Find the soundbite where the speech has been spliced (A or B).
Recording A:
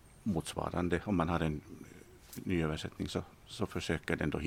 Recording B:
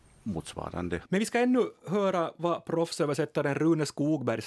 B